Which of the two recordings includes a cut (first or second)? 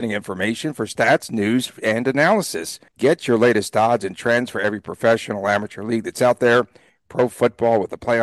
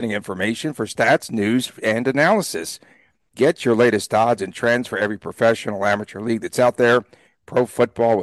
first